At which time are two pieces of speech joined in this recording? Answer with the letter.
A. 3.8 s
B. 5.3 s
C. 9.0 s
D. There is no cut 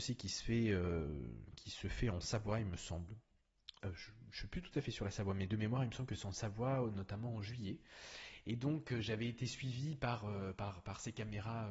A